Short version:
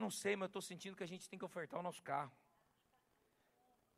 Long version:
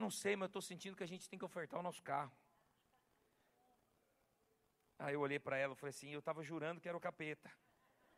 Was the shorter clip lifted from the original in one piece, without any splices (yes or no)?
yes